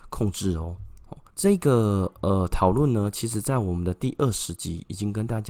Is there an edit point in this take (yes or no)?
yes